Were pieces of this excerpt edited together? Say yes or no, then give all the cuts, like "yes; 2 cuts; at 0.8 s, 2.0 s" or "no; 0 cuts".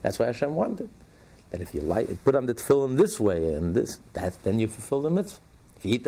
no; 0 cuts